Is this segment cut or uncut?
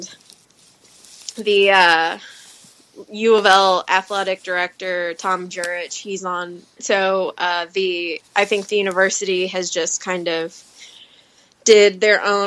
cut